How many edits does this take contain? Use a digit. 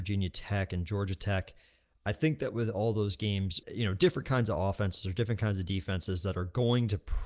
1